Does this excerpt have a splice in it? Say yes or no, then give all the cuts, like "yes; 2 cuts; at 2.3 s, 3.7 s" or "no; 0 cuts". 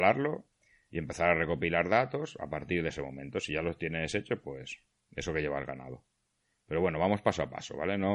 no; 0 cuts